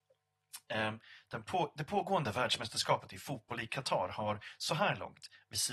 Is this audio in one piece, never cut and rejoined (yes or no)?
yes